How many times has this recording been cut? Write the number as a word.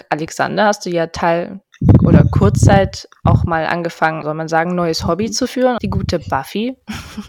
two